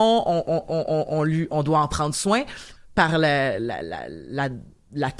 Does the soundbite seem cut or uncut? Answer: cut